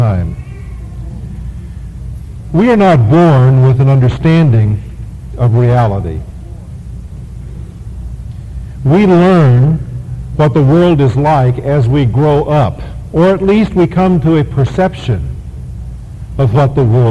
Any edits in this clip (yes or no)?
no